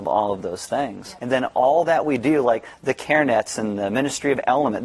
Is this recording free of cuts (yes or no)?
no